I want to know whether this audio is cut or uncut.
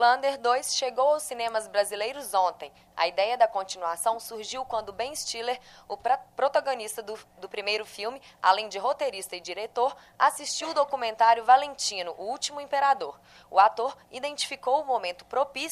uncut